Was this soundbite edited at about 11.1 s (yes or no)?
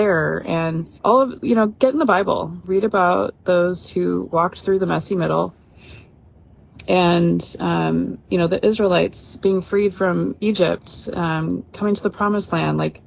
no